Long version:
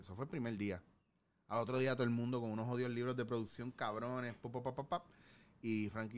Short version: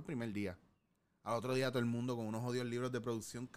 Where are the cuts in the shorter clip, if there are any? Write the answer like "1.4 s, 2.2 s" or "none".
none